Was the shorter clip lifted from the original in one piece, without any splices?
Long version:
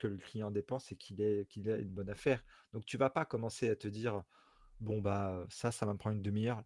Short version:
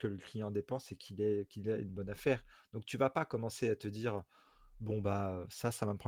yes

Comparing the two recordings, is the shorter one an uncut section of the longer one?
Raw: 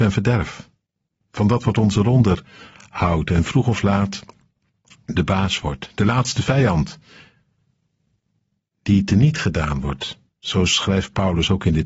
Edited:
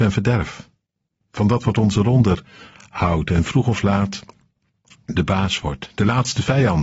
yes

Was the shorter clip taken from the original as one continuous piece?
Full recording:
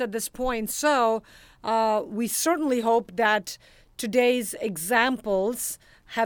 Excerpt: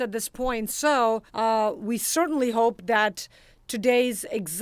no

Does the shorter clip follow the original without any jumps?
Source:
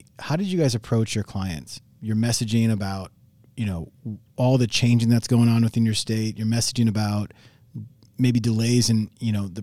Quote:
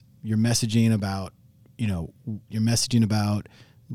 no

